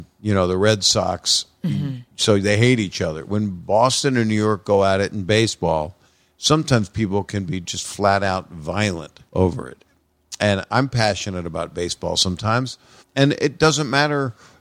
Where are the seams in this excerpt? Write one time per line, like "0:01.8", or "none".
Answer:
0:09.3
0:13.0